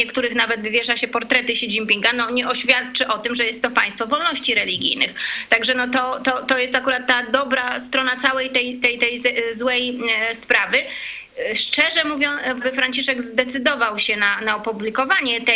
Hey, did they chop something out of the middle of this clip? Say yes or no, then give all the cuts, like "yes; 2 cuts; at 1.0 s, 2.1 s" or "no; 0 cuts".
yes; 1 cut; at 12.6 s